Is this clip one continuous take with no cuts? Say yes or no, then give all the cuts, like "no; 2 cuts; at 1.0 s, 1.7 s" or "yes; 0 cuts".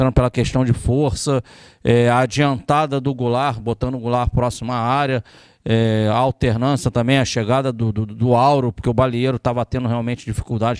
yes; 0 cuts